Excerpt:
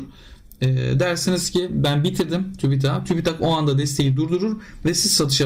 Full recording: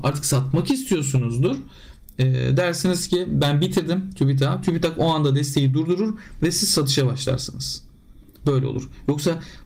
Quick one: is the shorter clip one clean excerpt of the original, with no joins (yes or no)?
yes